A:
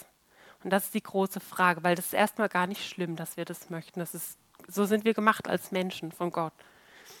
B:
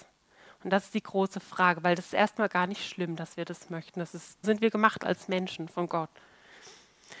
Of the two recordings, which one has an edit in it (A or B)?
B